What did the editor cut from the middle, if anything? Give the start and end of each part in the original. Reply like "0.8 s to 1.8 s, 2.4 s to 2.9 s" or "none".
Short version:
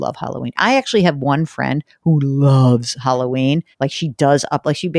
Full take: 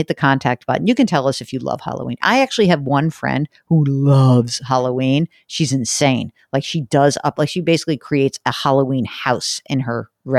5.4 s to 6.4 s